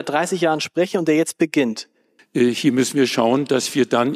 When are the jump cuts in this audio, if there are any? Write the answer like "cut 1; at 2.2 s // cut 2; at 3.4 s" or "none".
cut 1; at 2.2 s